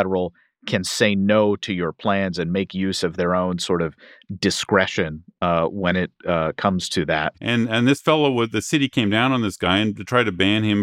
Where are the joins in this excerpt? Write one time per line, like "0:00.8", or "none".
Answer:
0:07.3